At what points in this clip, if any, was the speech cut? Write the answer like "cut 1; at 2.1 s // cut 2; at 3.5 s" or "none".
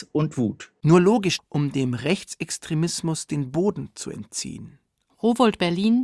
cut 1; at 1.4 s // cut 2; at 5.1 s